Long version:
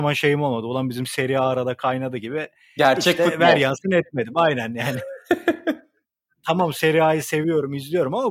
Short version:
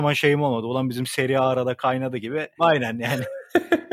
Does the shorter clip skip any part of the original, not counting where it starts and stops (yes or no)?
yes